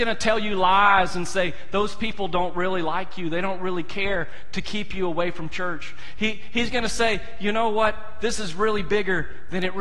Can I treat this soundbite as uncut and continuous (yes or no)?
yes